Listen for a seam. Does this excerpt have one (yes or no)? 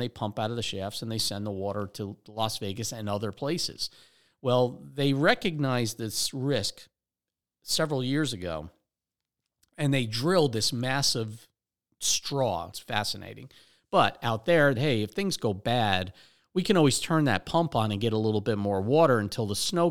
yes